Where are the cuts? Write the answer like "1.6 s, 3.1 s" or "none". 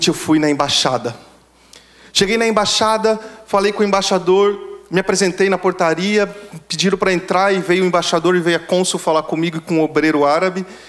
none